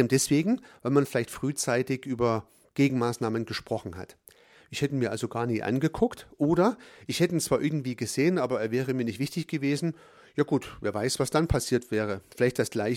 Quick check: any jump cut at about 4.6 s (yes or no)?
yes